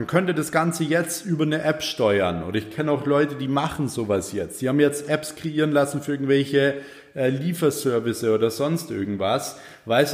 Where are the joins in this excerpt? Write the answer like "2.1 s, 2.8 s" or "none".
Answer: none